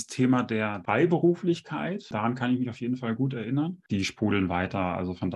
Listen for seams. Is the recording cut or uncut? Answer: cut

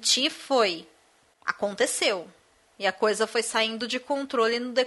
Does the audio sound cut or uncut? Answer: uncut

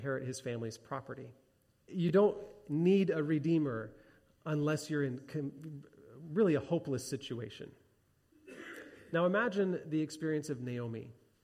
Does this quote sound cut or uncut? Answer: cut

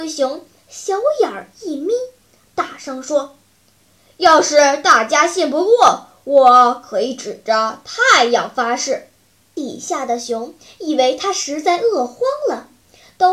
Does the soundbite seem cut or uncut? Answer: cut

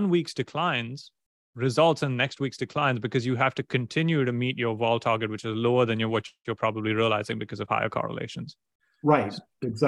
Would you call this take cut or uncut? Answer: uncut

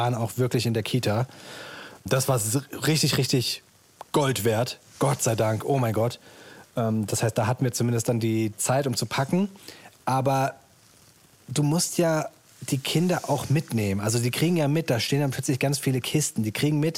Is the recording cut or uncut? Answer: uncut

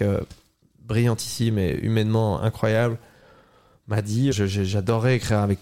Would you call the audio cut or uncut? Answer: cut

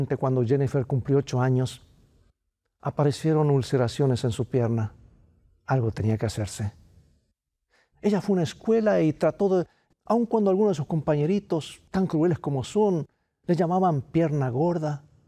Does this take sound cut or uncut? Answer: cut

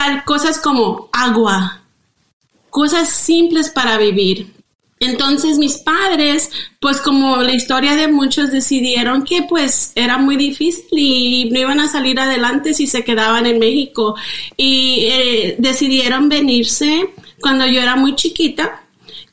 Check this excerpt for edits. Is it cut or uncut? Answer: cut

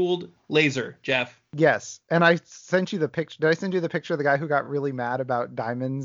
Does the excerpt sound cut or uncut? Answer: uncut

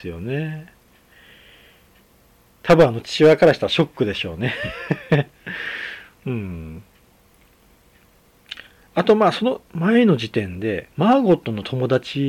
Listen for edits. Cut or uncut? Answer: cut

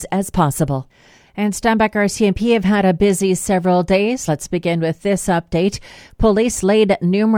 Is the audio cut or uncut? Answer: uncut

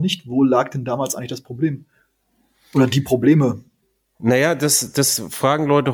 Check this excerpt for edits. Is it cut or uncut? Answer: uncut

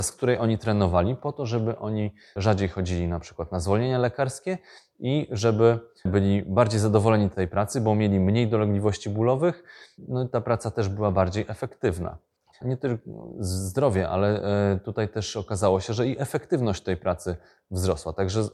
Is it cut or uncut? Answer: cut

